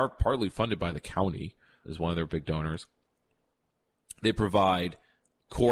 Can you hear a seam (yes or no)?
yes